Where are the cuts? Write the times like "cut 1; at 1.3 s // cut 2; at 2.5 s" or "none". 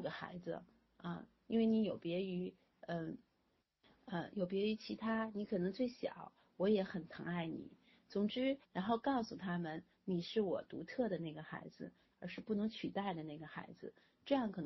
cut 1; at 8.6 s // cut 2; at 12.1 s